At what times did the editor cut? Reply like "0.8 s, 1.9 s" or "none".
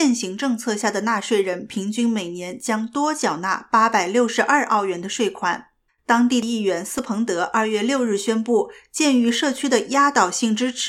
5.9 s